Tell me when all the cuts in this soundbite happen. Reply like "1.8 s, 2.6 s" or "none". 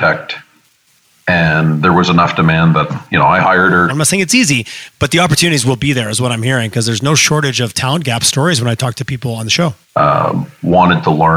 3.9 s, 9.8 s